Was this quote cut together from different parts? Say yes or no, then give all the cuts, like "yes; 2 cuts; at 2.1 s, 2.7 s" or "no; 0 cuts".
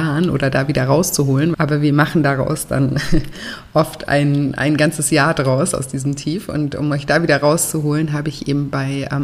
yes; 1 cut; at 1.5 s